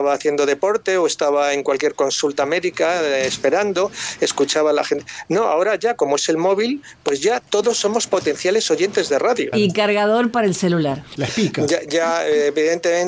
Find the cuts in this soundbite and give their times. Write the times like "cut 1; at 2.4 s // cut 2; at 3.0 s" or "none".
cut 1; at 9.5 s // cut 2; at 11.2 s